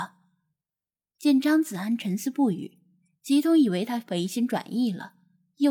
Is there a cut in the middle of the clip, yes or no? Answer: no